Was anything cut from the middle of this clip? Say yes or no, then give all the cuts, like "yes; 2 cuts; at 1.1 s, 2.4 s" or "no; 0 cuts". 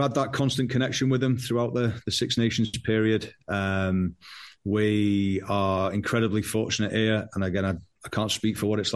no; 0 cuts